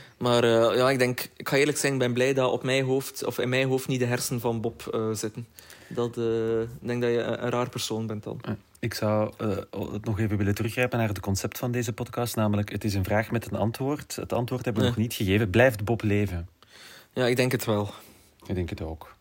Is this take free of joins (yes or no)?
yes